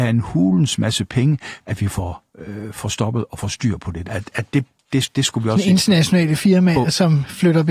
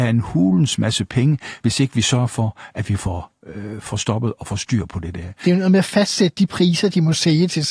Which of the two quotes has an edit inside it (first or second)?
first